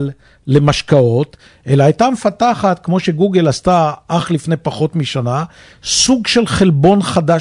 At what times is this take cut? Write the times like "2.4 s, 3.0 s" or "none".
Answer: none

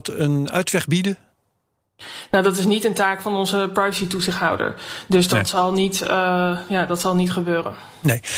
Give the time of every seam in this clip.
none

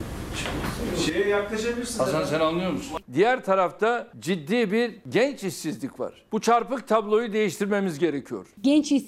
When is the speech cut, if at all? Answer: 3.0 s

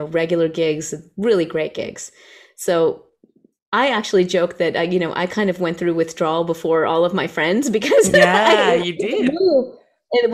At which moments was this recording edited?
none

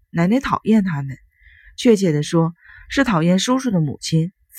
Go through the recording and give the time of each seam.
none

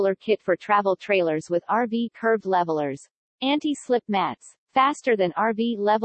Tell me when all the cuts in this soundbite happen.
3.3 s, 4.6 s

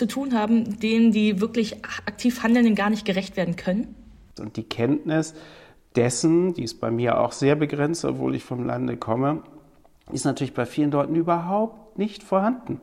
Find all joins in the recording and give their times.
4.4 s

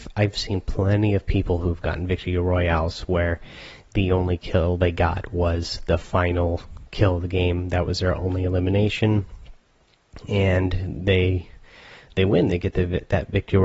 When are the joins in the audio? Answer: none

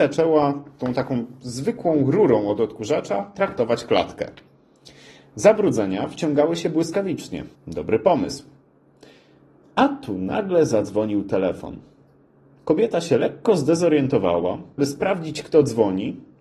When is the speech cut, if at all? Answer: 7.5 s, 14.8 s

